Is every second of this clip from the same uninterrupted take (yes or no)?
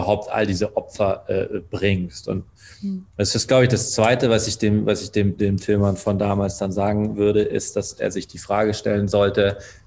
no